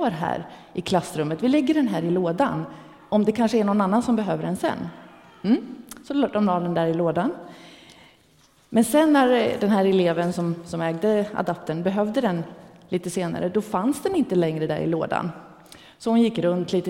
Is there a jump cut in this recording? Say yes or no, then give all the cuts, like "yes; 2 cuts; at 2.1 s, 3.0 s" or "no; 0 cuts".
no; 0 cuts